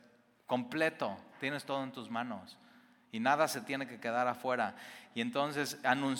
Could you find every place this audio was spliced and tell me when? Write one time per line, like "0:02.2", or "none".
0:01.3